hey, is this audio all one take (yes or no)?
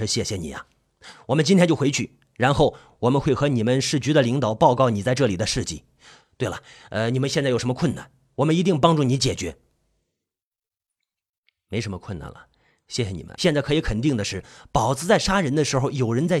no